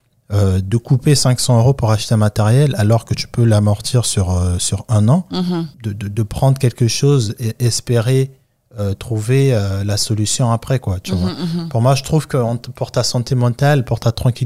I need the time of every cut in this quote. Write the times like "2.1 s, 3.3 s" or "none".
5.7 s